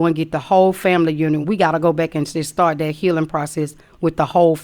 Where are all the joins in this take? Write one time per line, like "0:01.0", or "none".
0:01.4